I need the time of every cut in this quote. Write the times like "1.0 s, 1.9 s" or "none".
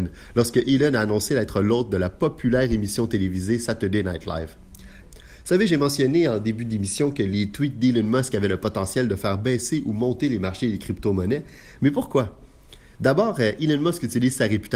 5.0 s

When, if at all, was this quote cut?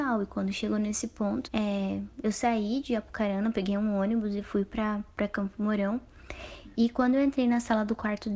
1.5 s, 6.7 s

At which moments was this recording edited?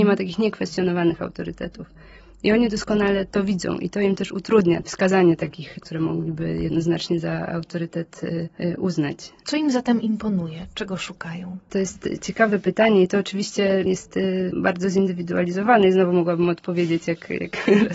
5.8 s

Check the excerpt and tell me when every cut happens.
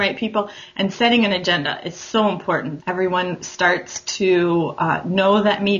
2.8 s

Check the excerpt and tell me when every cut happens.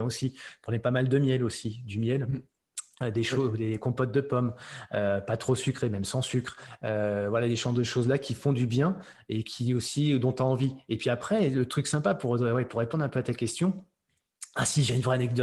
none

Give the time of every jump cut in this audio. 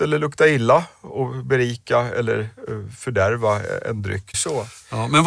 4.3 s

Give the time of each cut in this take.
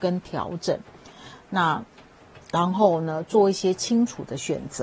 none

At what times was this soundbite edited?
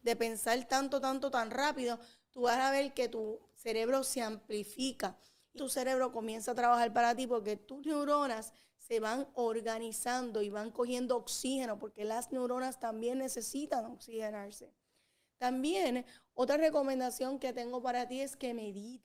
5.6 s

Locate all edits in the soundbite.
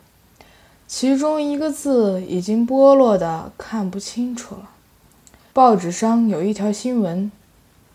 5.5 s

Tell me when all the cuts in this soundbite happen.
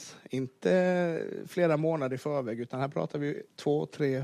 none

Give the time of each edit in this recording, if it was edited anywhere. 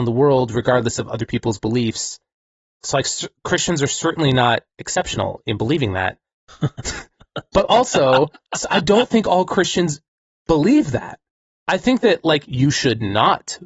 12.5 s

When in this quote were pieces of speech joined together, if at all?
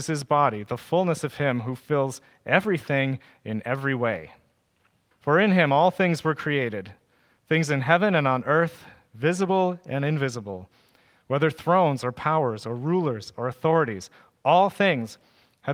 5.1 s

